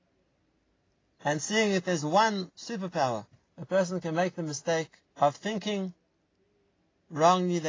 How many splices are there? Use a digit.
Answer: 2